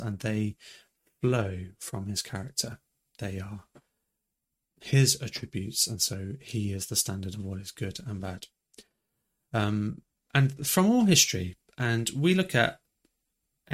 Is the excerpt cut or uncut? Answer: uncut